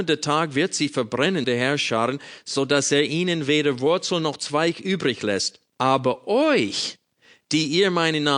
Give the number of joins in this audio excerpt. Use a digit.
2